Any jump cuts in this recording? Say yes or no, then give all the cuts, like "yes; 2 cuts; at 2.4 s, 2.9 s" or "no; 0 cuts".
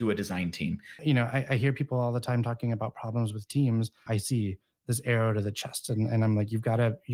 yes; 2 cuts; at 1.0 s, 4.1 s